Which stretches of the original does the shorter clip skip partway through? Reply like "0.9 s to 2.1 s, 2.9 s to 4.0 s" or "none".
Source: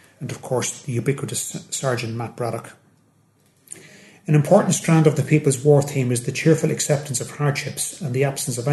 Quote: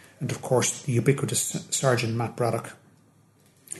none